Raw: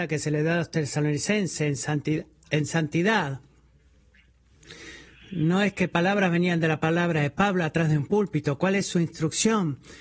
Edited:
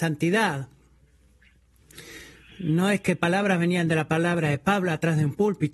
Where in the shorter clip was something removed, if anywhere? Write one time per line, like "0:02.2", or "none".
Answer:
none